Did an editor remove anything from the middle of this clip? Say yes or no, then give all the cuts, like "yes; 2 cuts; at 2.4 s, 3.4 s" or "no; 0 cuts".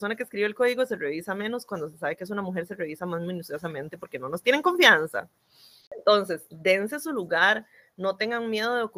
no; 0 cuts